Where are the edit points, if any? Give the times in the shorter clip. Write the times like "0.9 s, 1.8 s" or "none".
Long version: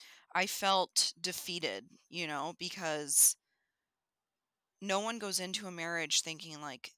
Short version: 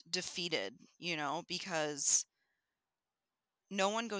none